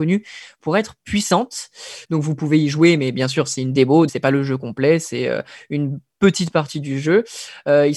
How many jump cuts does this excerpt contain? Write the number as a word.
two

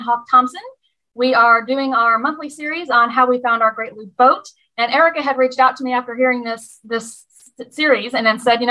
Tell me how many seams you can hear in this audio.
zero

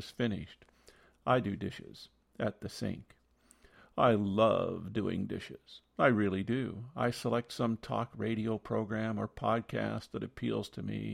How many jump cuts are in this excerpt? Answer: zero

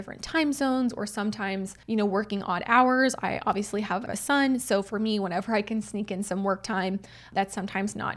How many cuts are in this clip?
one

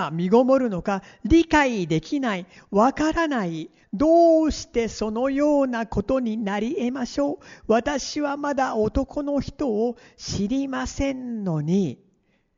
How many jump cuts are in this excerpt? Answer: one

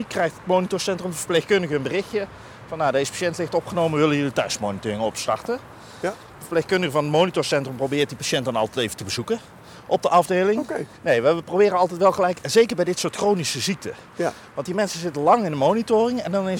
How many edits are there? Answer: one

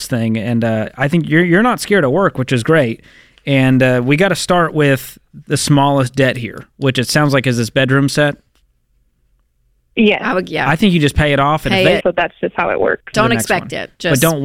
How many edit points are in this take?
two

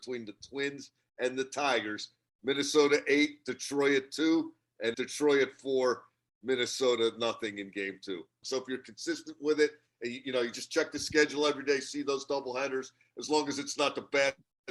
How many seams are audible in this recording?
two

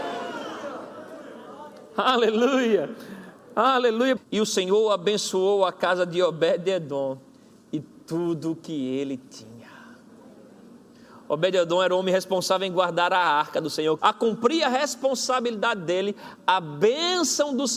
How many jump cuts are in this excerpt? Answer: two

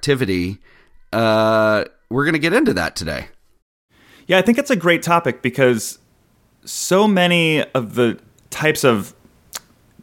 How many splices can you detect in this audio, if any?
zero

